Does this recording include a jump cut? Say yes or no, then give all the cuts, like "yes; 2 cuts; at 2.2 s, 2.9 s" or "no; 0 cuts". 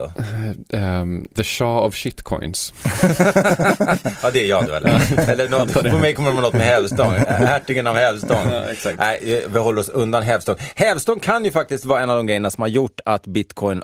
yes; 1 cut; at 1.3 s